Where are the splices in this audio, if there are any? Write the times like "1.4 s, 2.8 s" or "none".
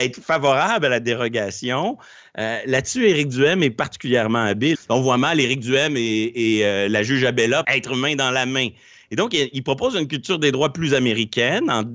4.7 s, 7.6 s